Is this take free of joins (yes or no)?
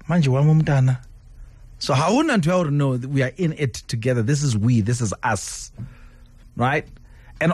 yes